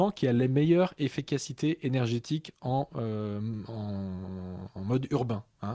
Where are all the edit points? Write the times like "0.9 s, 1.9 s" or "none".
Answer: none